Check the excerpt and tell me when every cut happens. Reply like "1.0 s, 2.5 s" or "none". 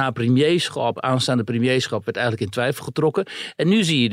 none